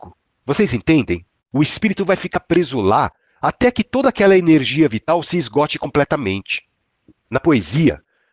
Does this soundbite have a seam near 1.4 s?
yes; 1 cut; at 1.4 s

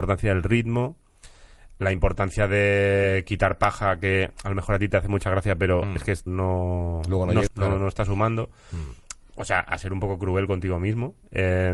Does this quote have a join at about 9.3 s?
no; 2 cuts; at 6.3 s, 7.5 s

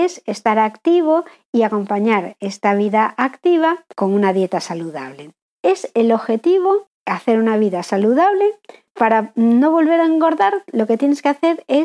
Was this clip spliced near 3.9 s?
yes; 1 cut; at 3.9 s

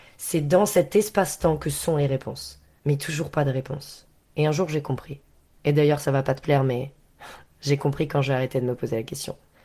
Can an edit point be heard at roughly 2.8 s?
yes; 1 cut; at 2.8 s

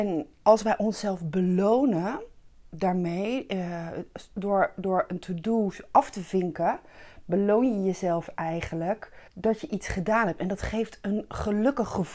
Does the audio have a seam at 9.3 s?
yes; 1 cut; at 9.3 s

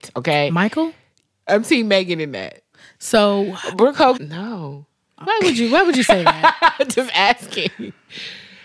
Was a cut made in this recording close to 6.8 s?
no; 3 cuts; at 1.3 s, 4.1 s, 5.2 s

